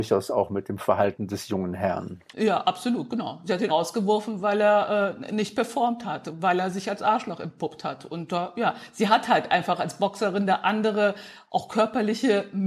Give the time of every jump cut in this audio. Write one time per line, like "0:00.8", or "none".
0:03.7